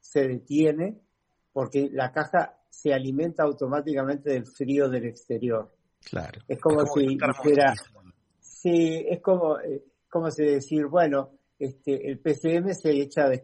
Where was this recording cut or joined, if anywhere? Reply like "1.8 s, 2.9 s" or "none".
none